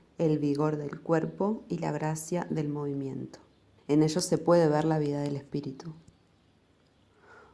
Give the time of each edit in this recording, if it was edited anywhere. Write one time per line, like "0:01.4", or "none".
0:03.8